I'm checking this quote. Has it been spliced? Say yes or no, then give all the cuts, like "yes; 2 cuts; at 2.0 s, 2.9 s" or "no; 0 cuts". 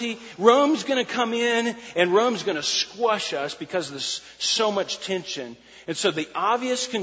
no; 0 cuts